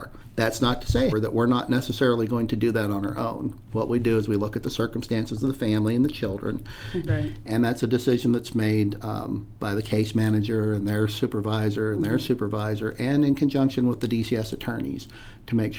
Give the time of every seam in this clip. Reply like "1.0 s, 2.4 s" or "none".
1.1 s, 7.1 s